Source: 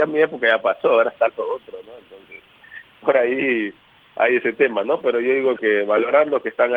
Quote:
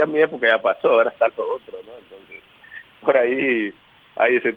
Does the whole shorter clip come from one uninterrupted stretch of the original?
yes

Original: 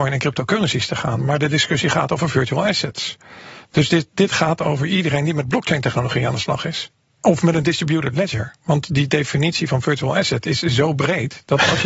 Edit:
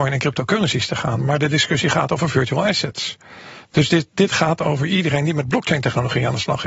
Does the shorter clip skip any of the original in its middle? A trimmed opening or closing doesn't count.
no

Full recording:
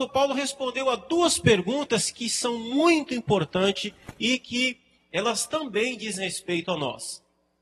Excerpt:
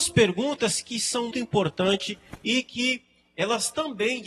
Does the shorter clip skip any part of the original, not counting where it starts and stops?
yes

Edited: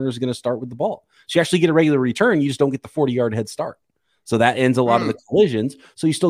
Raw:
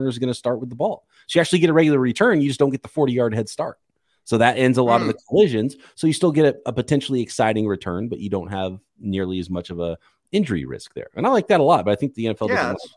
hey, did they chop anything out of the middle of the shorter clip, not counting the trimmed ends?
no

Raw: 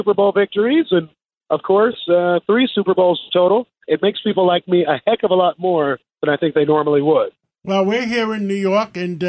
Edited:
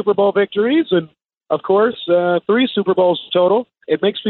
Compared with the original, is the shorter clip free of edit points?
yes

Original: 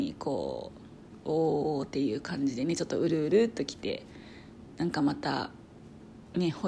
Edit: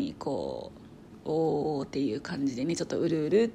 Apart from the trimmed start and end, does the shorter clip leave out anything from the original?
no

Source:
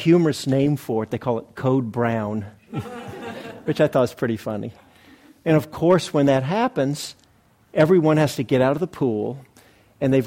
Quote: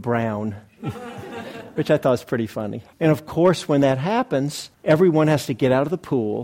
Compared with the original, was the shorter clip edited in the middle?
yes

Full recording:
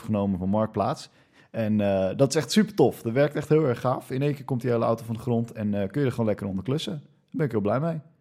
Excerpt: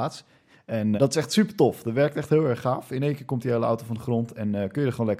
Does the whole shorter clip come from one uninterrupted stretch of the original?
no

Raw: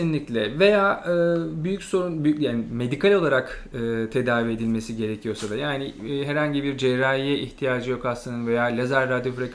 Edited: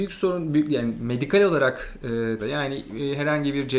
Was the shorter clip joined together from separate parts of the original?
yes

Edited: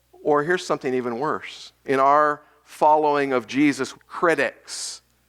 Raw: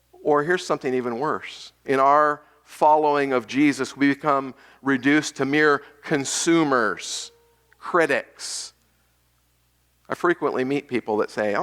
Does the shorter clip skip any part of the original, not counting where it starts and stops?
yes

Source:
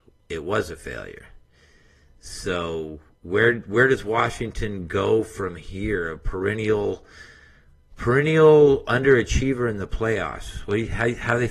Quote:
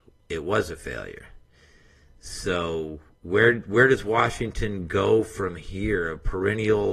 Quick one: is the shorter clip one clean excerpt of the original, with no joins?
yes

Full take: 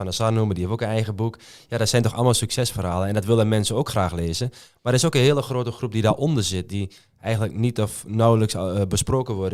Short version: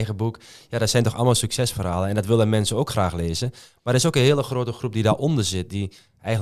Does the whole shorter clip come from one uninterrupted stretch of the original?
yes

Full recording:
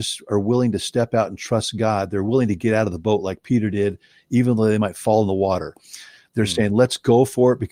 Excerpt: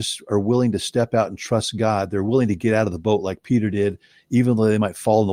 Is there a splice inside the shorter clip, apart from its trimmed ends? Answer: no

